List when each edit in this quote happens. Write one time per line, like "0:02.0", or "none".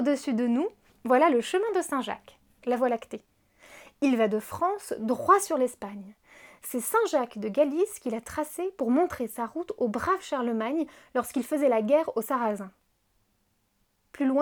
none